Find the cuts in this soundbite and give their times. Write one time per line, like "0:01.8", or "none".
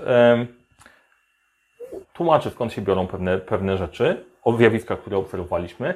0:02.0